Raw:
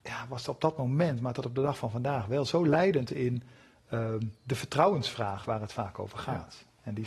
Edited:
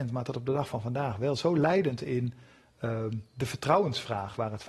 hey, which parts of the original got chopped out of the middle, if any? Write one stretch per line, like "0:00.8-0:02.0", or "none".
none